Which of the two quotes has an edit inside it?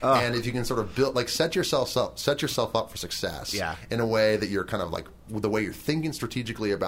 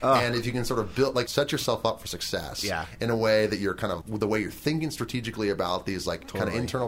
second; 2 cuts; at 1.3 s, 4.0 s

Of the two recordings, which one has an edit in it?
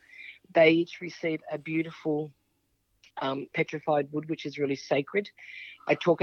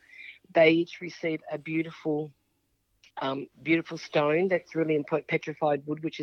first; 1 cut; at 3.5 s

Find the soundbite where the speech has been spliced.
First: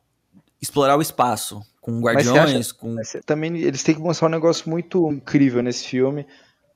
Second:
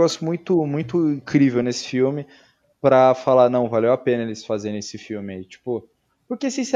first; 2 cuts; at 3.2 s, 5.1 s

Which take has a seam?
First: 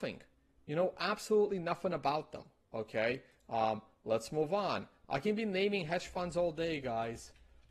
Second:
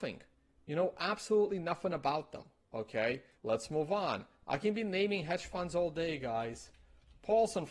second; 1 cut; at 3.4 s

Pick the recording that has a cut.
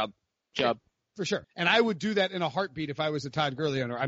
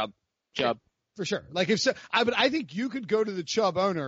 first; 1 cut; at 1.4 s

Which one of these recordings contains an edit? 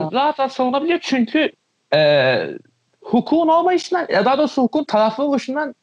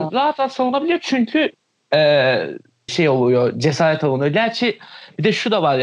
second; 1 cut; at 2.9 s

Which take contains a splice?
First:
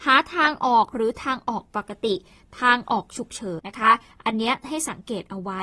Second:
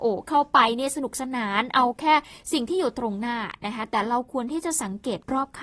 first; 1 cut; at 3.6 s

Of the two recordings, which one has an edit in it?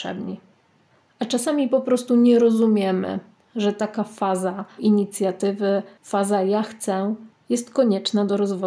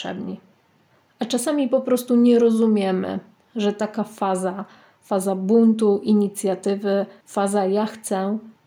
first; 1 cut; at 4.8 s

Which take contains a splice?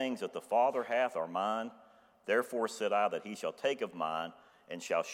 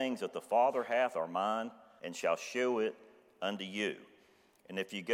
second; 1 cut; at 2.0 s

